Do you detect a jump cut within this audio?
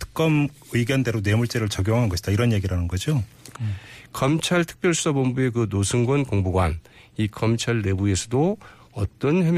yes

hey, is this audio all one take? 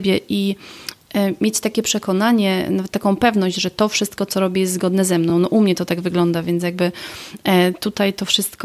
yes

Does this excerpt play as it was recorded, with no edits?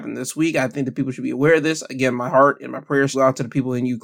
no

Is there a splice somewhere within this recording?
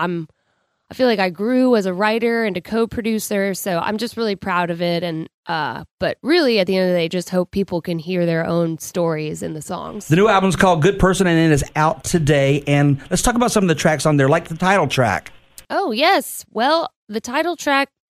no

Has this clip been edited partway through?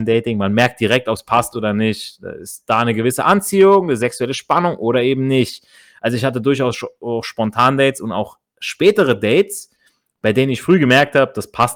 no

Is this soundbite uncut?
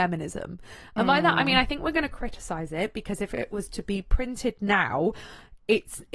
yes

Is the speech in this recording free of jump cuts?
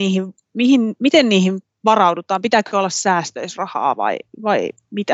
yes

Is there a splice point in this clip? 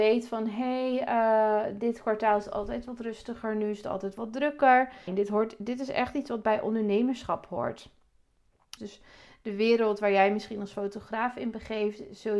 yes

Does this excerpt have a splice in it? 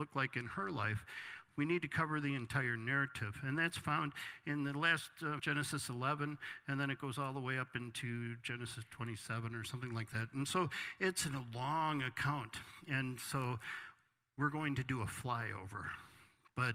yes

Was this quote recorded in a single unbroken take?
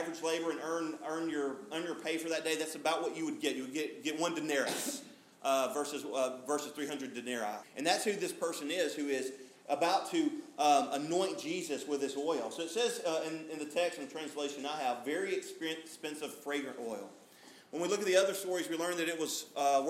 no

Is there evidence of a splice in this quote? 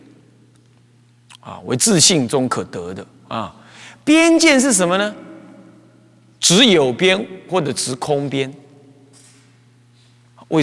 no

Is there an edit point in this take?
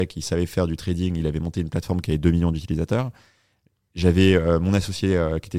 no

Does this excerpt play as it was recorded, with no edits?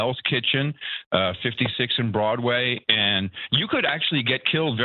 yes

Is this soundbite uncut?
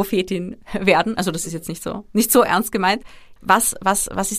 yes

